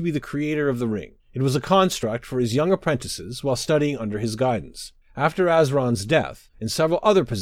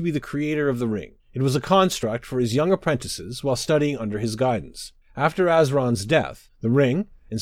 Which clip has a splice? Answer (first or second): first